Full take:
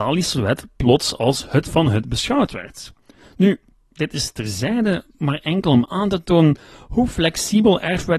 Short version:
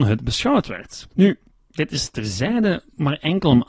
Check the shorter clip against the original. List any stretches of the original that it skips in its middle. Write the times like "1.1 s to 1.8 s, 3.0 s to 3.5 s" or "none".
3.0 s to 3.3 s